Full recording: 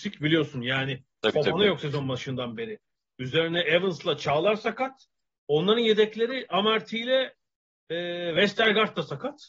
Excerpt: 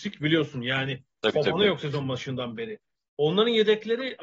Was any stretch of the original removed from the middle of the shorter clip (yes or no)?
yes